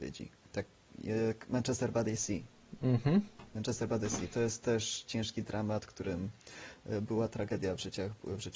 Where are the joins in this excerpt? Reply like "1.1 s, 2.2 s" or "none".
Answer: none